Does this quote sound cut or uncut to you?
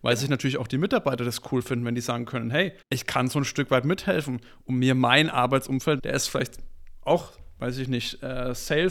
cut